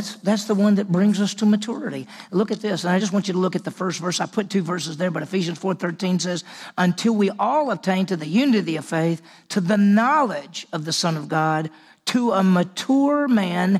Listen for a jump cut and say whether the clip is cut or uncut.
uncut